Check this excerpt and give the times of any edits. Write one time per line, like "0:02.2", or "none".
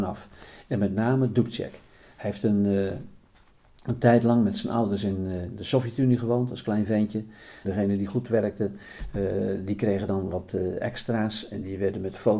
0:07.6